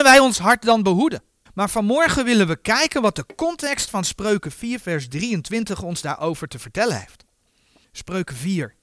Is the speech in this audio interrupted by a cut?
yes; 1 cut; at 1.5 s

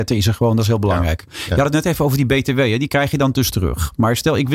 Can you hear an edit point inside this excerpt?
no; 0 cuts

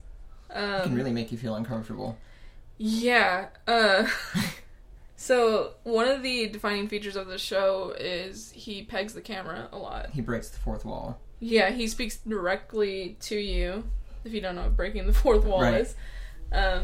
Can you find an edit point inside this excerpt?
no; 0 cuts

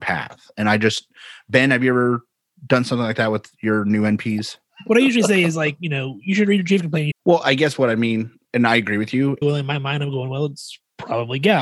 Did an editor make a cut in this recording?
yes; 2 cuts; at 7.1 s, 9.4 s

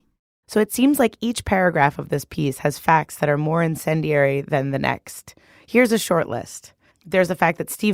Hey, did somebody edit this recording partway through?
yes; 1 cut; at 6.9 s

